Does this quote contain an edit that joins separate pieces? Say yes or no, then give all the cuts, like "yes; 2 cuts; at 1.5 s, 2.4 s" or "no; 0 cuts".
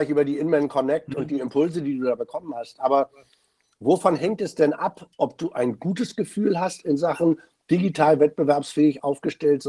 no; 0 cuts